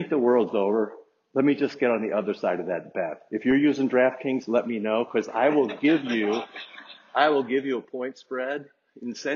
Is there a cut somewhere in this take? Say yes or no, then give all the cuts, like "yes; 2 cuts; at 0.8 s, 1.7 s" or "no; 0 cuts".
no; 0 cuts